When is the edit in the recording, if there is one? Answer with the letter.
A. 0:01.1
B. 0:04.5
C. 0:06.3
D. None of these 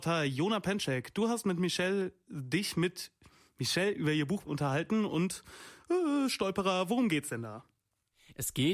B